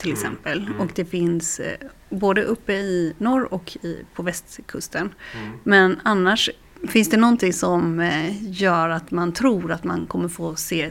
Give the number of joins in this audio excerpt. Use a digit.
0